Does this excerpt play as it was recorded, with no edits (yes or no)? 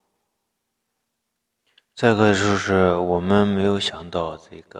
yes